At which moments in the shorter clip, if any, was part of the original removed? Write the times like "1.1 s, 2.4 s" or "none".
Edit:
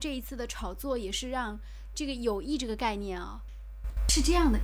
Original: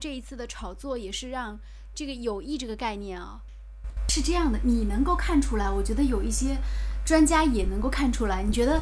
none